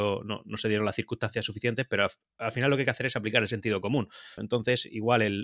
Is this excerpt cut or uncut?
cut